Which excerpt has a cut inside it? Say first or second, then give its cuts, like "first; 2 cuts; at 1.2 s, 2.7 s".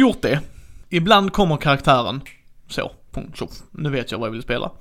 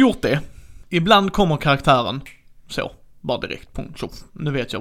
first; 1 cut; at 3.1 s